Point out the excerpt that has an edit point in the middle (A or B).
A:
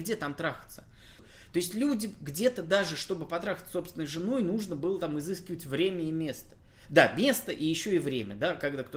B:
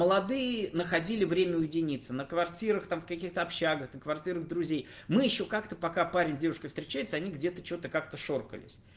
A